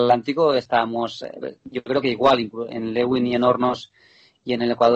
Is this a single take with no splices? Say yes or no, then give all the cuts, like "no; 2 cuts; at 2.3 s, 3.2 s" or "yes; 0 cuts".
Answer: no; 2 cuts; at 1.6 s, 2.7 s